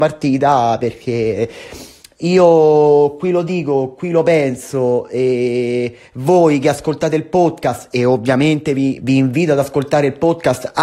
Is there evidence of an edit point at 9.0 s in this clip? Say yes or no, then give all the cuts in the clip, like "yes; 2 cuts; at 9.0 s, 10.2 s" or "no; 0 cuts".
yes; 1 cut; at 9.0 s